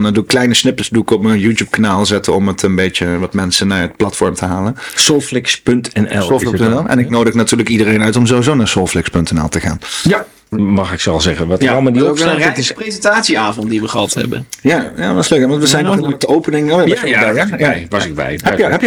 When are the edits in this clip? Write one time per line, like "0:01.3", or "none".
0:10.5

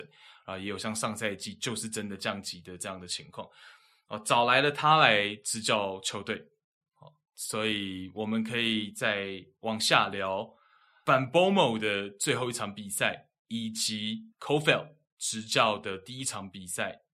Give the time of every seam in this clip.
none

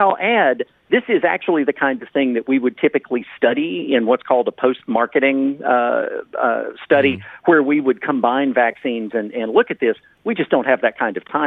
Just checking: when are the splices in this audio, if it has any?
none

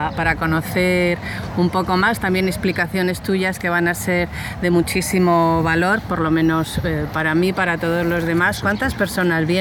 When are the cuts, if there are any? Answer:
none

